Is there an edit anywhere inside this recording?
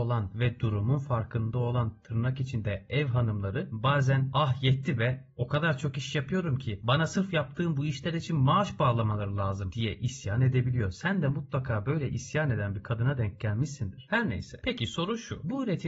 no; 0 cuts

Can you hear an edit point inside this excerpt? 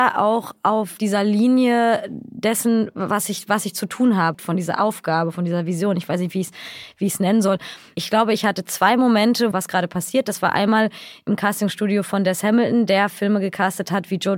yes; 2 cuts; at 4.3 s, 9.5 s

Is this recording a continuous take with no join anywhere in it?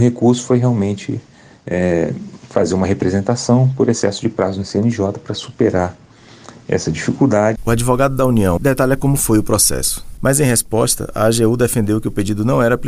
no; 3 cuts; at 7.6 s, 8.6 s, 10.2 s

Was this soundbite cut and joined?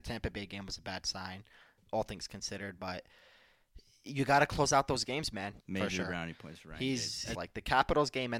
yes; 2 cuts; at 5.6 s, 7.3 s

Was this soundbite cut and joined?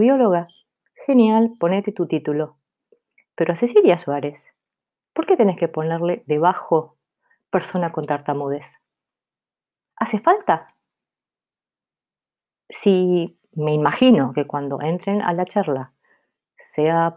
no; 0 cuts

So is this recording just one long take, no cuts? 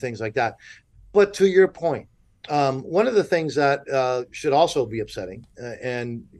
yes; 0 cuts

